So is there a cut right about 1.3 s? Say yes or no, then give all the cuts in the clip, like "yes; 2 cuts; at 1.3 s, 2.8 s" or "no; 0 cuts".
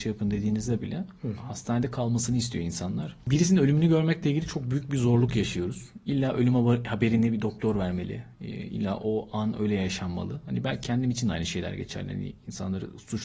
no; 0 cuts